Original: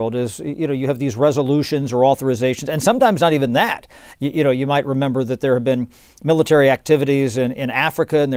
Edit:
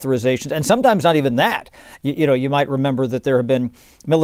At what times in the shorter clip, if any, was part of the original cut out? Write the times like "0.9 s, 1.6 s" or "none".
none